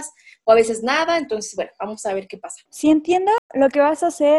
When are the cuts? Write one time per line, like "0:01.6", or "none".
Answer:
0:02.7